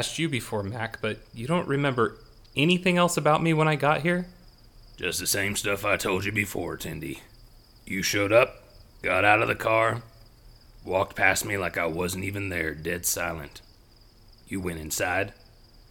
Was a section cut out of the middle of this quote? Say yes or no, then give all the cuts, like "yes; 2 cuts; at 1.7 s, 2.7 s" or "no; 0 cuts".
yes; 1 cut; at 8.9 s